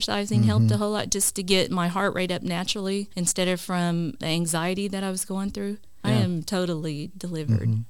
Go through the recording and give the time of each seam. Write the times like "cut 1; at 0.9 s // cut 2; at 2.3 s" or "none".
cut 1; at 3.1 s // cut 2; at 4.2 s // cut 3; at 6.0 s